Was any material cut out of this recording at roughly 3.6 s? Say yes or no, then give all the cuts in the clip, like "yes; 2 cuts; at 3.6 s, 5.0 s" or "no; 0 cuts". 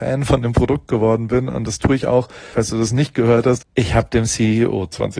yes; 2 cuts; at 2.5 s, 3.6 s